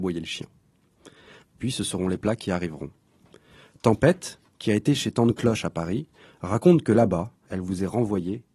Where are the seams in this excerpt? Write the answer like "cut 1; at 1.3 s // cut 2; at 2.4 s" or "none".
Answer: cut 1; at 1.4 s // cut 2; at 7.5 s